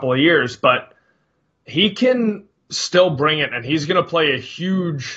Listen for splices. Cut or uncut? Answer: uncut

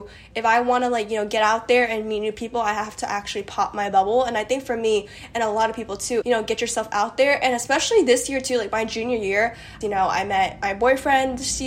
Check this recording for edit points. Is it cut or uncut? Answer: cut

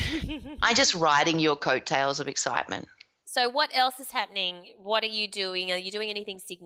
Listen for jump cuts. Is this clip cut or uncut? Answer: uncut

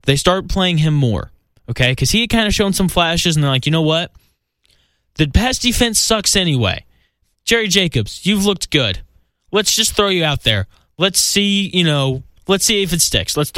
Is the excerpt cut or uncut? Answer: uncut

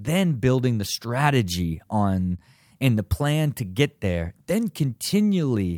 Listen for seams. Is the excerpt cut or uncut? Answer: uncut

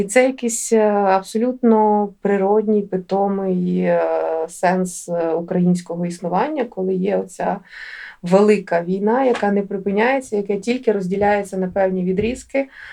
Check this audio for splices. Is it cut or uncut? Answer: uncut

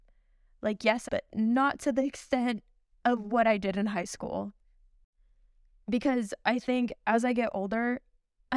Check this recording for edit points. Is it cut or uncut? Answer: cut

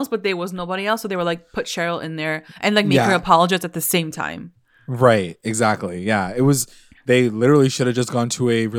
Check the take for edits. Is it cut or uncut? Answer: uncut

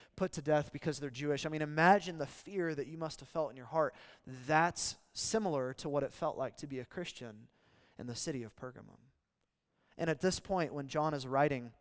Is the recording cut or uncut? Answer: uncut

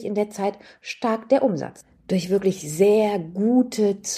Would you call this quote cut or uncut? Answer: uncut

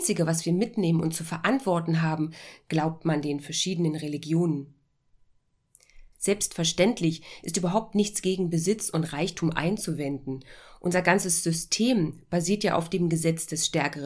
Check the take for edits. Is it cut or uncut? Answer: cut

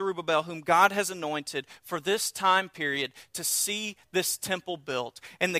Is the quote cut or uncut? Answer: uncut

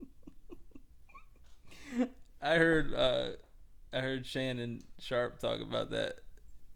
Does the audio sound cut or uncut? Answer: uncut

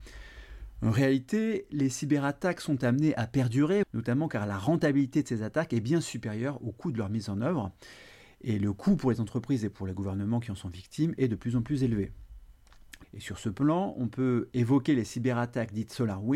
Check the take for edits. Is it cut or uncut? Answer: cut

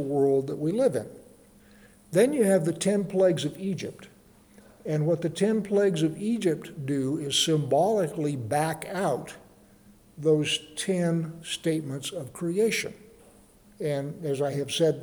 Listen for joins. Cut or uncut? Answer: cut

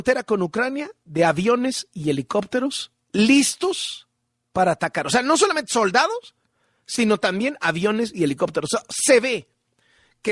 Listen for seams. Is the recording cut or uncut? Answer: uncut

